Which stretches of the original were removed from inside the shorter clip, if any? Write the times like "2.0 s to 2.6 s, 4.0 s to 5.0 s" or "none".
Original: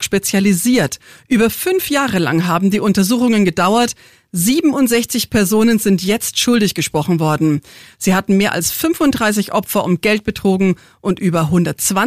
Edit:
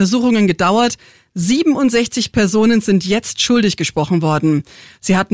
none